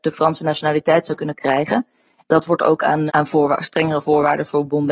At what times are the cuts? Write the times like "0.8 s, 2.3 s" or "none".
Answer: 3.1 s